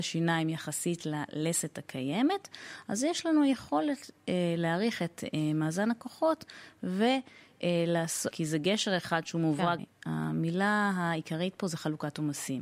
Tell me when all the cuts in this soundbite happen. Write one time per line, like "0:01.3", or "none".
0:08.3
0:09.8